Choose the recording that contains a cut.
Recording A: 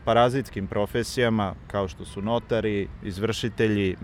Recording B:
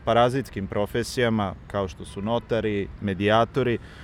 B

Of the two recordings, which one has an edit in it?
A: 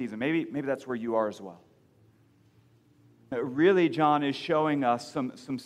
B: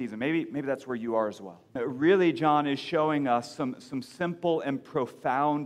B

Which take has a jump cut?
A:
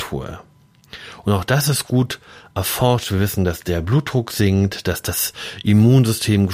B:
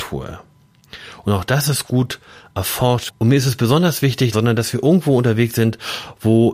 B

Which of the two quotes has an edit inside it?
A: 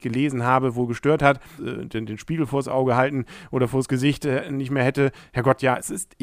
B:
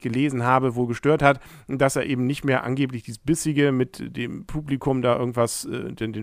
A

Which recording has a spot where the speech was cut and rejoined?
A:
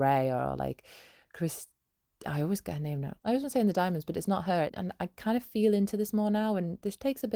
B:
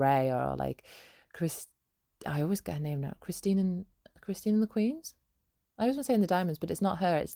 A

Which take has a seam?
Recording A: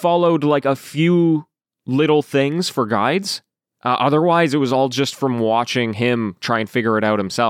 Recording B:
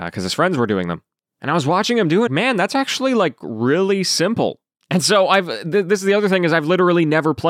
B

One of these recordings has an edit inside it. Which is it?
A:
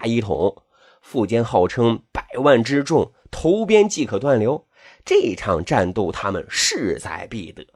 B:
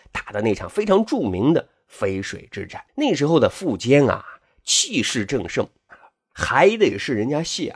B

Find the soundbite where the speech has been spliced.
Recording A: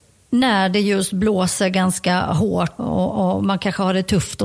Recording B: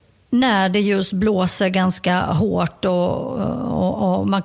A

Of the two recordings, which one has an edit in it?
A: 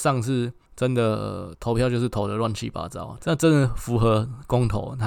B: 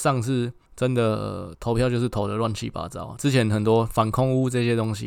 A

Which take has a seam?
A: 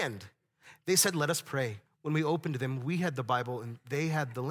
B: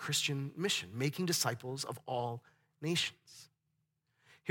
A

